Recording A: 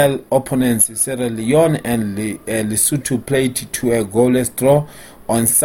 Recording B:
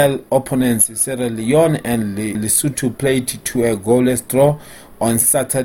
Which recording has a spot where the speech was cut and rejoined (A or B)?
B